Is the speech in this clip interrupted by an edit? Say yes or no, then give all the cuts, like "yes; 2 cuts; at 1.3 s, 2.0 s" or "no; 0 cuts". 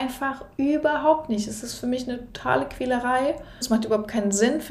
yes; 1 cut; at 3.6 s